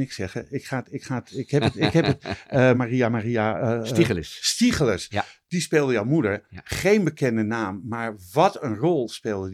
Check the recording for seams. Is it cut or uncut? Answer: cut